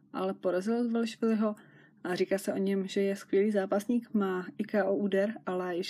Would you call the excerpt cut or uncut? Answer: uncut